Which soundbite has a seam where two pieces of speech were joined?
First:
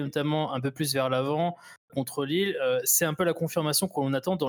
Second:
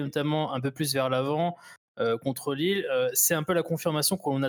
first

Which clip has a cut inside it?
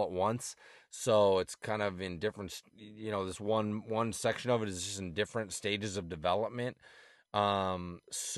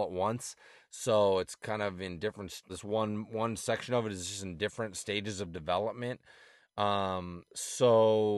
second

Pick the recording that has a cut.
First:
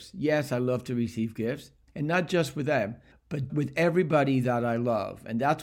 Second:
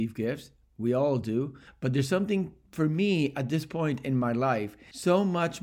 first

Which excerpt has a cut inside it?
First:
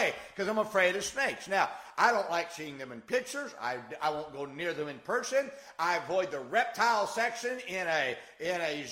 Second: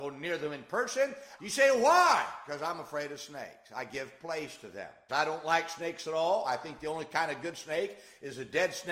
second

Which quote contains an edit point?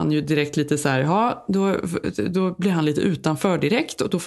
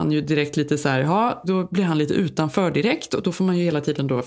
second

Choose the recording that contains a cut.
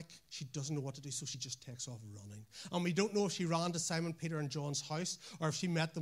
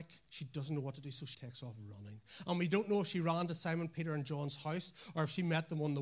second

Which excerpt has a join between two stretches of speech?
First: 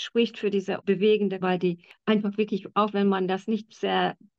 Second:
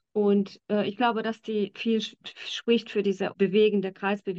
first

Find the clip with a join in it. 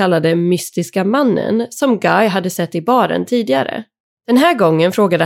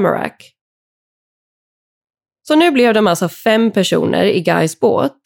first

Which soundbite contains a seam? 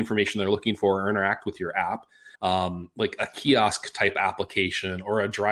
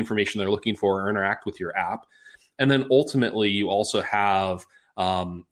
first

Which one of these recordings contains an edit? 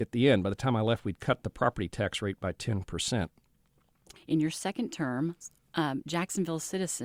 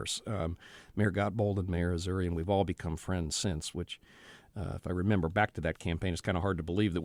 first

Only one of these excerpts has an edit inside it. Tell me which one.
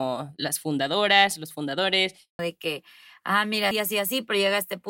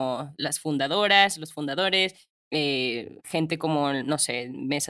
first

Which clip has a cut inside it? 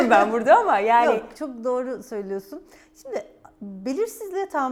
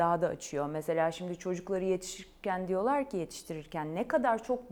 first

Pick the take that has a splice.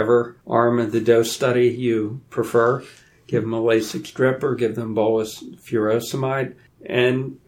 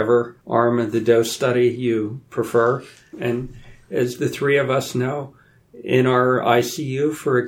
second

